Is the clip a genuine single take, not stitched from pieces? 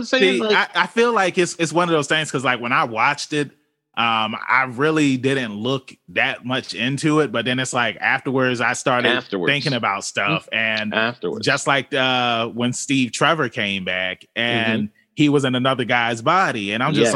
yes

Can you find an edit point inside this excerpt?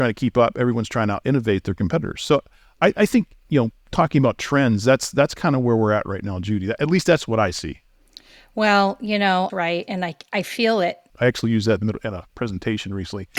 yes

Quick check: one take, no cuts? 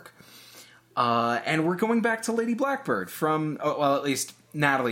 yes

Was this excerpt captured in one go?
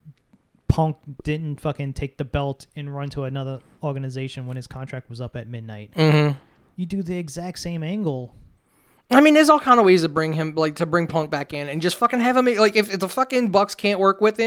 yes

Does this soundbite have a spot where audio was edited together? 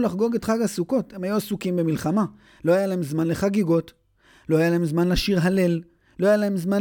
no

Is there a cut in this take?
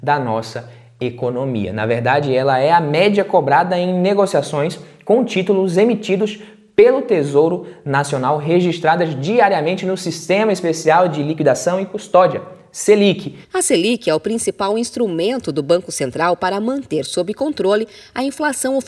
no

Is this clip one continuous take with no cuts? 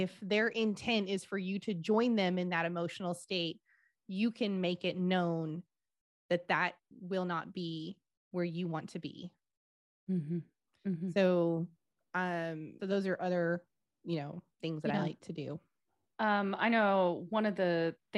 no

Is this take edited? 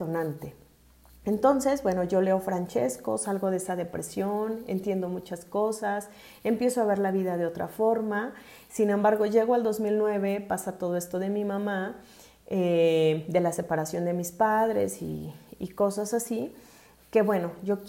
no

